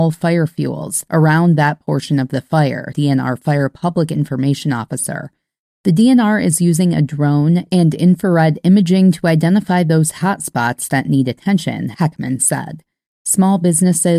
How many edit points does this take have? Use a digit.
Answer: 2